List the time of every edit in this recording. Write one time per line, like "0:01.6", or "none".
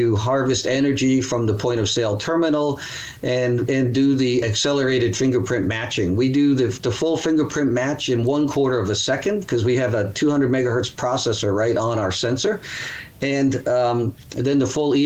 none